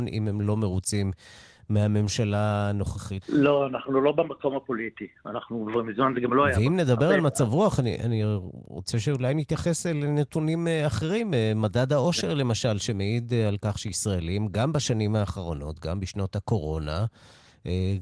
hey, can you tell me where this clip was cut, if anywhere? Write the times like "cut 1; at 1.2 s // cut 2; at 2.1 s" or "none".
cut 1; at 3.2 s